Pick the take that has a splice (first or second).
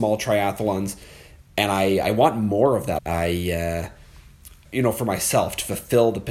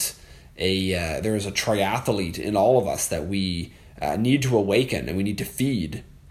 first